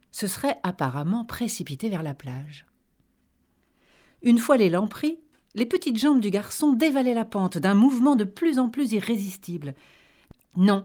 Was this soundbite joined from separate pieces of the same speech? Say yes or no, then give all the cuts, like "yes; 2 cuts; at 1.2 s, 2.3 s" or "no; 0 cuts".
no; 0 cuts